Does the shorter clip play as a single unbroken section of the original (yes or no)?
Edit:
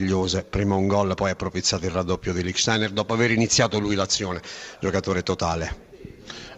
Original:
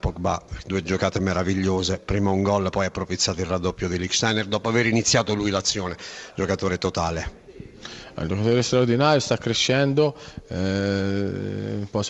yes